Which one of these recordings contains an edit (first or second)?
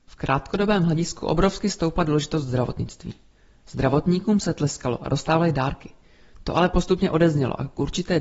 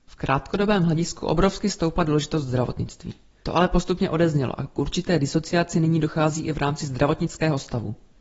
second